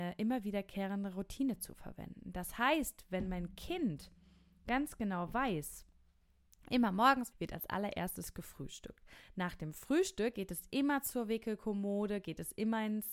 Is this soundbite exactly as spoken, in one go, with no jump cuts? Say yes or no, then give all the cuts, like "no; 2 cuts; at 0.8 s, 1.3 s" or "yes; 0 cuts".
no; 1 cut; at 7.3 s